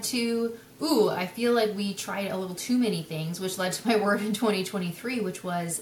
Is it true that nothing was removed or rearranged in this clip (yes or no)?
yes